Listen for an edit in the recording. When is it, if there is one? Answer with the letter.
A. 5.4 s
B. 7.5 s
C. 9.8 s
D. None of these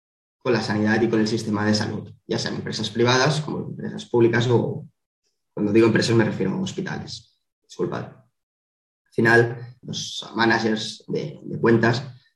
C